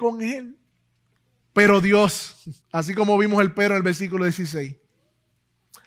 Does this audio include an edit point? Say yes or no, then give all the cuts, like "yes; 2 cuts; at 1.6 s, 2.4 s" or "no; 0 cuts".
yes; 2 cuts; at 1.4 s, 2.6 s